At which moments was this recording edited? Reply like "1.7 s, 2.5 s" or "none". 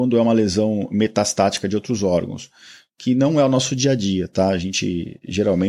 none